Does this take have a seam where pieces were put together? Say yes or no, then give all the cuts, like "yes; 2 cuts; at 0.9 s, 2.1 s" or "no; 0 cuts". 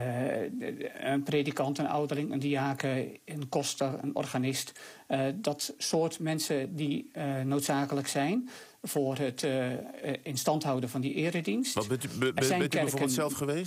no; 0 cuts